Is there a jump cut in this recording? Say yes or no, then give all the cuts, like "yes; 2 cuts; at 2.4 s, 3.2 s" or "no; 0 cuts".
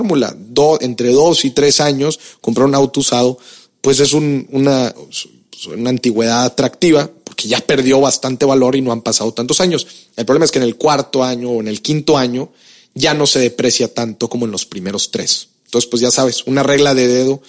no; 0 cuts